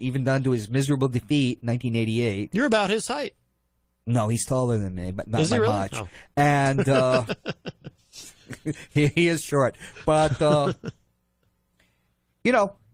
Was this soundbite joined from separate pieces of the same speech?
no; 0 cuts

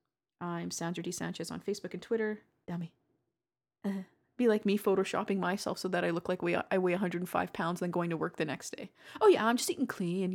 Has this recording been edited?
yes; 1 cut; at 2.6 s

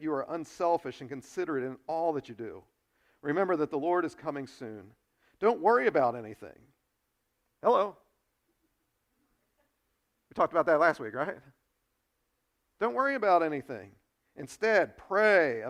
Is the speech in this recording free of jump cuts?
yes; 0 cuts

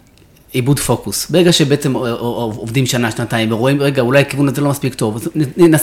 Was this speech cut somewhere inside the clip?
no; 0 cuts

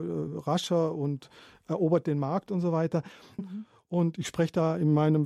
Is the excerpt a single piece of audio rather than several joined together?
no; 1 cut; at 3.4 s

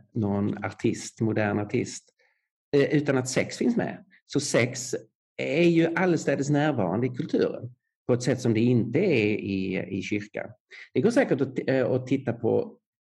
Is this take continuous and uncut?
yes; 0 cuts

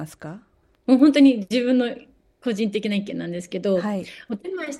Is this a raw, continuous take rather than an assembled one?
yes; 0 cuts

